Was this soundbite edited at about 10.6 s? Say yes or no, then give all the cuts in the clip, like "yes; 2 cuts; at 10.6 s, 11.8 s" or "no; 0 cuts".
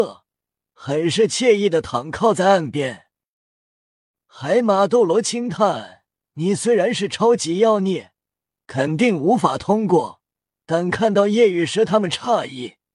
yes; 2 cuts; at 8.5 s, 10.6 s